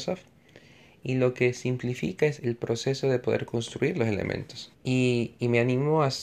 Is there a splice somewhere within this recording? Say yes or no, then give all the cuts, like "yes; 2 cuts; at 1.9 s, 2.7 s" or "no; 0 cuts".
yes; 2 cuts; at 2.4 s, 4.7 s